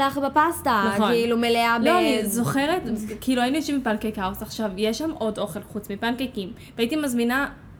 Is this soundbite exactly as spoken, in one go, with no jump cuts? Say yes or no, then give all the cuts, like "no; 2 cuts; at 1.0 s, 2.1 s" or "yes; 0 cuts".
yes; 0 cuts